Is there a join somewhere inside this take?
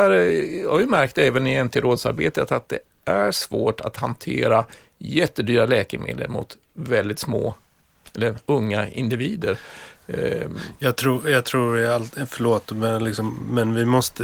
no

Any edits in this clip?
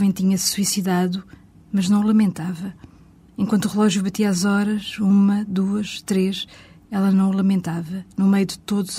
no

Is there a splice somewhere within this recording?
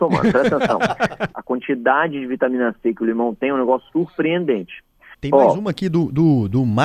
yes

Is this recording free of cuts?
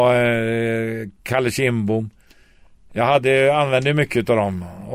yes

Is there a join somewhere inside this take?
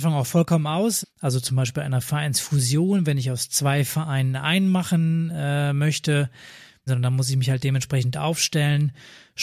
yes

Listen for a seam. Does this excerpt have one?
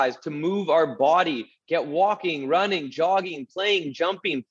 no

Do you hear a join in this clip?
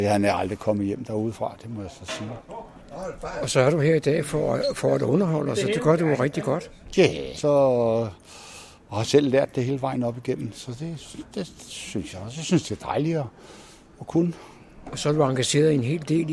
yes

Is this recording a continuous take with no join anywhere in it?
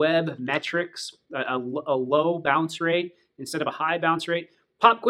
yes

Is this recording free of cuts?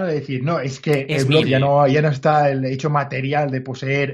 no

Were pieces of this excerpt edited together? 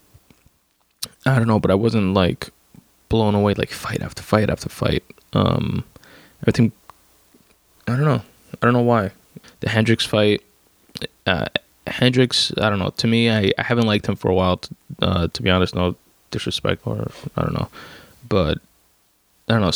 yes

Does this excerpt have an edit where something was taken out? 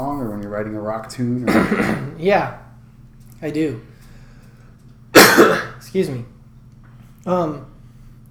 no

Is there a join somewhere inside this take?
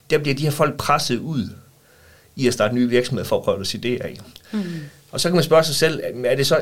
no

